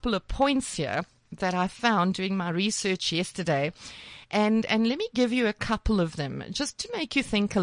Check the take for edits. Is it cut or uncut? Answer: uncut